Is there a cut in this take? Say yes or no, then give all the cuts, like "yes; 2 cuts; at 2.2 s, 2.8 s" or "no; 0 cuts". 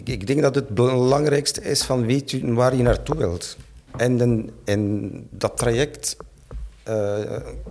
no; 0 cuts